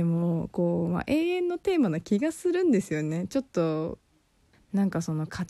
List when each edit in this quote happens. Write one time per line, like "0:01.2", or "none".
0:04.5